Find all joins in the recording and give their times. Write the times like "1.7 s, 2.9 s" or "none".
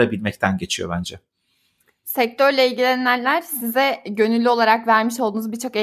none

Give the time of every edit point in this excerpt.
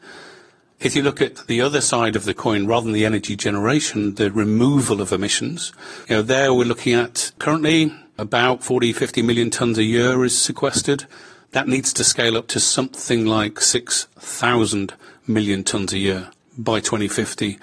6.0 s

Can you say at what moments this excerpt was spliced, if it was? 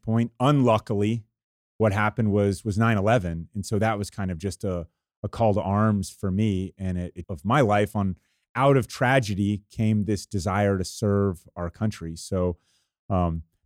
7.2 s

